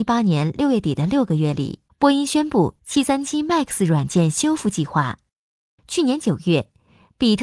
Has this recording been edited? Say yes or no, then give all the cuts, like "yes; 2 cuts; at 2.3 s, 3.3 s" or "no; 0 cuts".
yes; 2 cuts; at 1.9 s, 5.8 s